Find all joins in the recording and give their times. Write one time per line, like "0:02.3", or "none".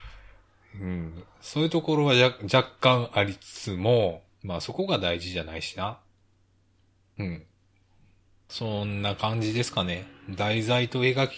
none